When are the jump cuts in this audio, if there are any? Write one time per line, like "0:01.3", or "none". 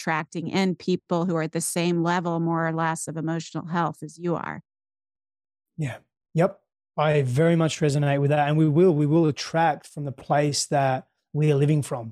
none